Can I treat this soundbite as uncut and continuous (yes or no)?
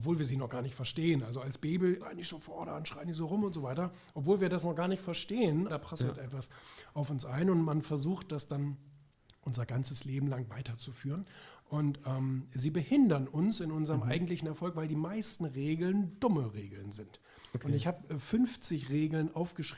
no